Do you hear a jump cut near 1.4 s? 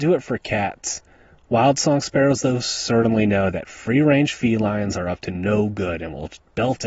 no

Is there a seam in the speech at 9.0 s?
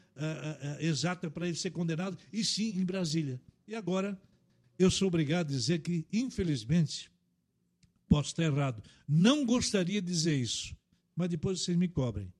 no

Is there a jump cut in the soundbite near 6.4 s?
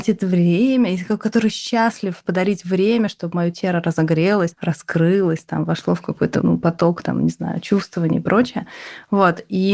yes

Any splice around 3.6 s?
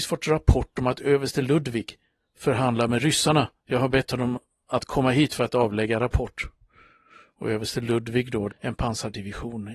no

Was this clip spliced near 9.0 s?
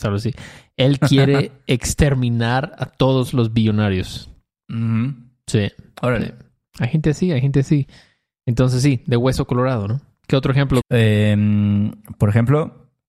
no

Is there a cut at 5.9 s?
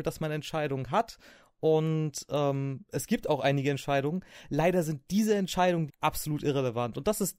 yes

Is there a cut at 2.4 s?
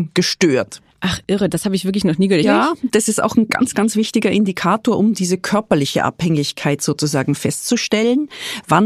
yes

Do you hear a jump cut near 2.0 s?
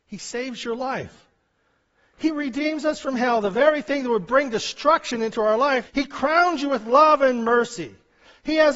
no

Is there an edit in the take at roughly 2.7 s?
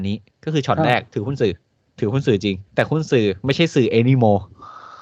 yes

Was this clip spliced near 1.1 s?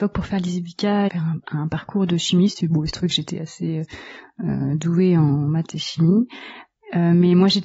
yes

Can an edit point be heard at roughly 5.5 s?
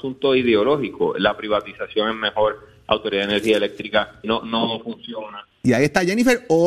yes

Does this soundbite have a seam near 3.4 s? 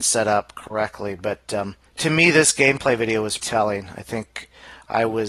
yes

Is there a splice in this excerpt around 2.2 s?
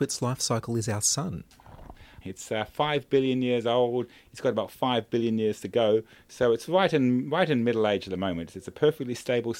yes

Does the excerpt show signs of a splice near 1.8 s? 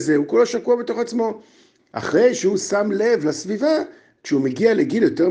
yes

